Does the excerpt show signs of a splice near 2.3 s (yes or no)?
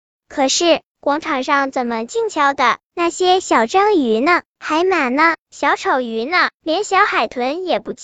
yes